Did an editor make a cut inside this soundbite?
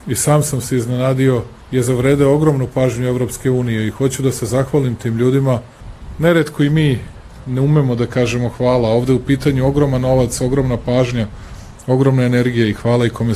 no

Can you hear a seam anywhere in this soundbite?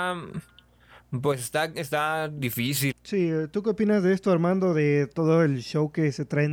yes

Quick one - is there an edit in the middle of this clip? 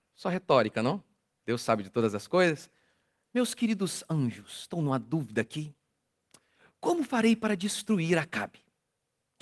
no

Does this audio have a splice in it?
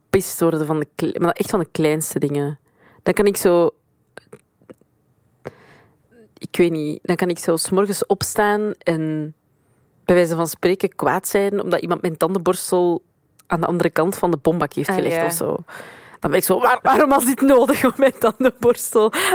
yes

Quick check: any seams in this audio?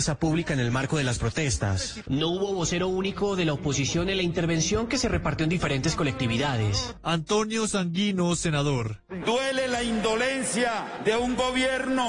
yes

